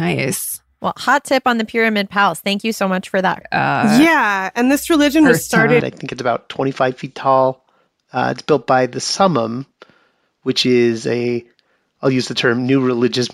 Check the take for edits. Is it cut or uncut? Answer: cut